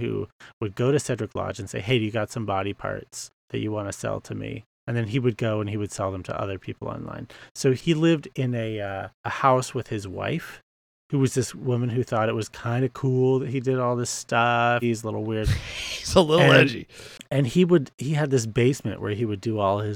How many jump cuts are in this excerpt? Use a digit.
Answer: 1